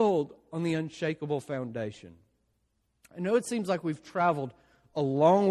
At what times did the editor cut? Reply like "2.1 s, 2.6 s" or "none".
none